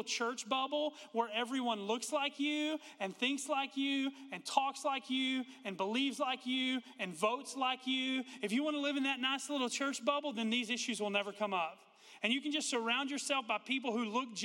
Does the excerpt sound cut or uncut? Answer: uncut